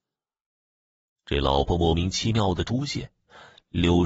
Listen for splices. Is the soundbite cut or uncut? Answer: cut